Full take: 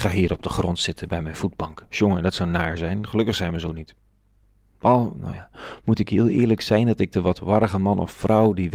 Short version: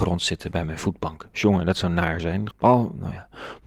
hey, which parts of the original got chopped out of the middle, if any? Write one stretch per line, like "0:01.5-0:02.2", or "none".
0:03.1-0:04.7